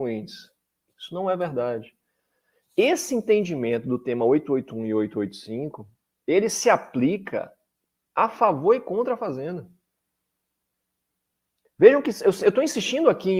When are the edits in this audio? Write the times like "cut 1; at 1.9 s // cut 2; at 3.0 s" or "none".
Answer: none